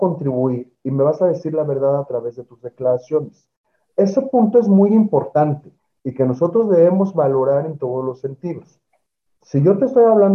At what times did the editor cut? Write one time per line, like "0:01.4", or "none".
none